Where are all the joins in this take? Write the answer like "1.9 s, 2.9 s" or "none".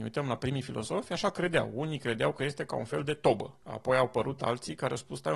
3.6 s